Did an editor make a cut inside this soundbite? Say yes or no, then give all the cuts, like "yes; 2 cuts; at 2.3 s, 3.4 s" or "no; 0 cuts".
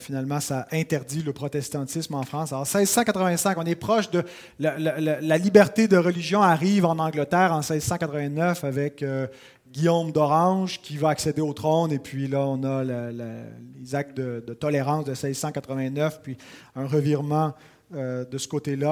no; 0 cuts